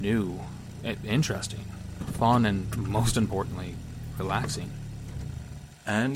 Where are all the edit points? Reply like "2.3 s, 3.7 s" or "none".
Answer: none